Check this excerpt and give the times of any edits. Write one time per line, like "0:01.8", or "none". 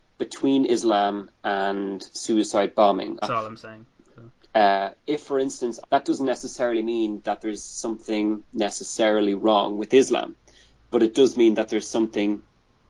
0:03.2
0:04.4
0:05.8